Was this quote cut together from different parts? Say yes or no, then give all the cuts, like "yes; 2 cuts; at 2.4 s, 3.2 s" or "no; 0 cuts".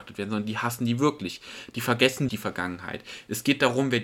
yes; 1 cut; at 2.3 s